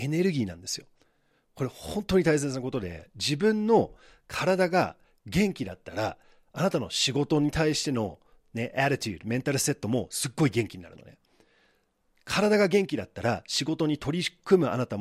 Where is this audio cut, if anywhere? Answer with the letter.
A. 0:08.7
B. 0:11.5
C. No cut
C